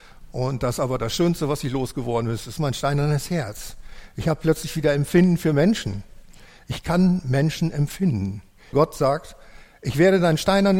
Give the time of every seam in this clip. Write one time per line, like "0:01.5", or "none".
0:08.7